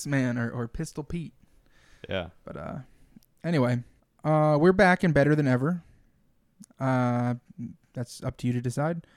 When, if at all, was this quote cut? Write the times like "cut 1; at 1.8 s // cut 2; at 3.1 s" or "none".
none